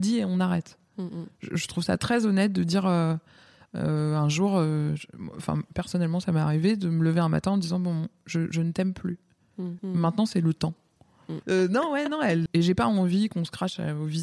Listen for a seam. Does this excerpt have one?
yes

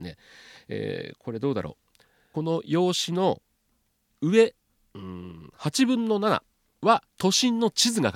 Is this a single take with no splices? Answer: no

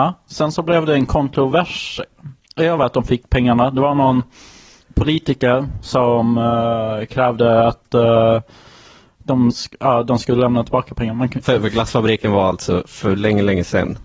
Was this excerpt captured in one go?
yes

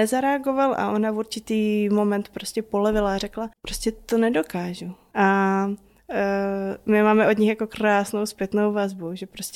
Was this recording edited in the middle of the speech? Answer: yes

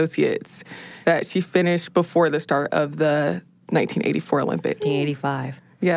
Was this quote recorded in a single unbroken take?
no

